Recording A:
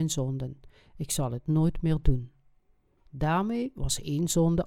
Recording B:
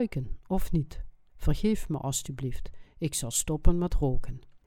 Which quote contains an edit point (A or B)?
B